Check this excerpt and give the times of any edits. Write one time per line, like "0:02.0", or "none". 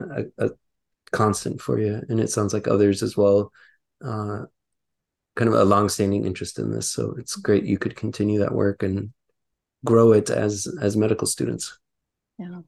none